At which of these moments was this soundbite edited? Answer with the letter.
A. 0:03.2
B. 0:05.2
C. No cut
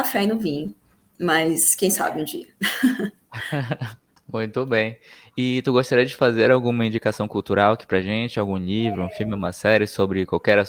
C